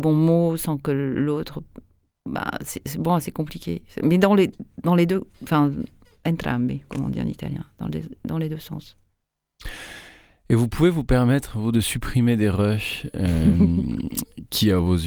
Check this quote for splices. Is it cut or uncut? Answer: uncut